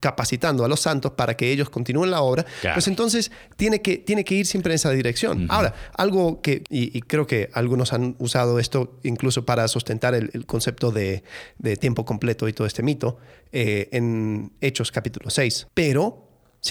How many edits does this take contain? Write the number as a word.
three